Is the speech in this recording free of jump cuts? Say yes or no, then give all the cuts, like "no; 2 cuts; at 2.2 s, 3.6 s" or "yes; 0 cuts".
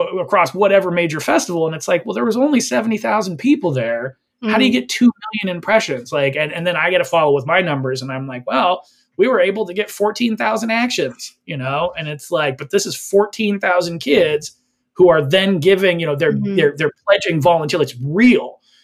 yes; 0 cuts